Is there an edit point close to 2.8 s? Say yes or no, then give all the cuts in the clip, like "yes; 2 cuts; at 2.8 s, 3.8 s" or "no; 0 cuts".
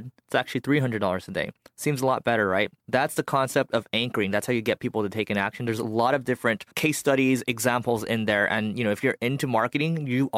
yes; 2 cuts; at 2.8 s, 6.7 s